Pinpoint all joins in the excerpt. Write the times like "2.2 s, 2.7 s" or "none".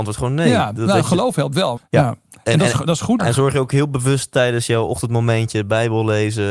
1.8 s, 3.2 s